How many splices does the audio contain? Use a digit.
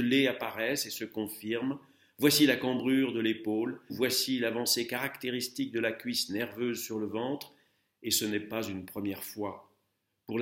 1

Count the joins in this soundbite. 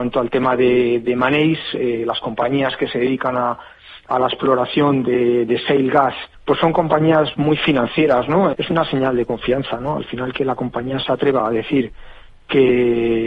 2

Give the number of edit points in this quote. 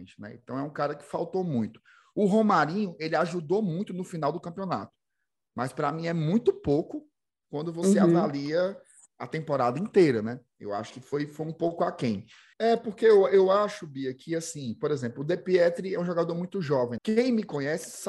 2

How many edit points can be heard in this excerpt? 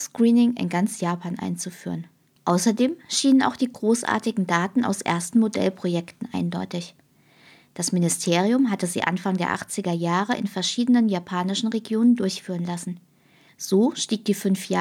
2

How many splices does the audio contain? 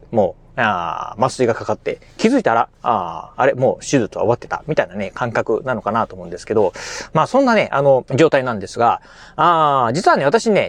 1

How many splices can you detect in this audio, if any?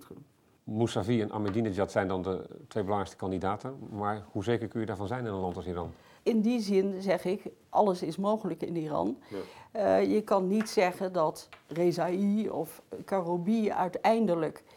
1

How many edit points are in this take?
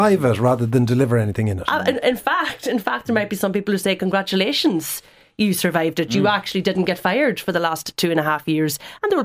0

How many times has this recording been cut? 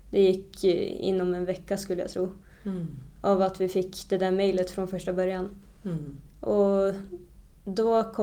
0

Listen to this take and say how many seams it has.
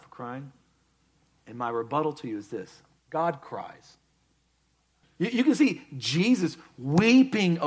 1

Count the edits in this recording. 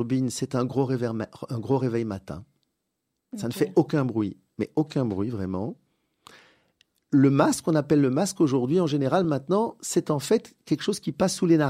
0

